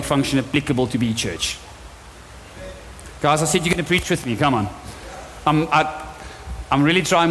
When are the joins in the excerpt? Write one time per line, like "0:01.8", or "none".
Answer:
none